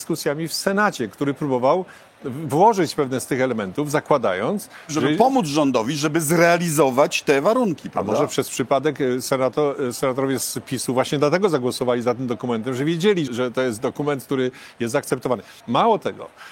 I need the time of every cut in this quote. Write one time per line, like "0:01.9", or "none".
0:13.3
0:15.6